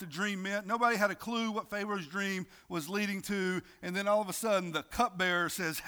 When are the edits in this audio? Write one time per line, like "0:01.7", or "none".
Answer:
none